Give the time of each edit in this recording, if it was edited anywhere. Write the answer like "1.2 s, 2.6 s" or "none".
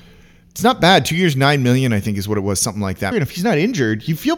3.1 s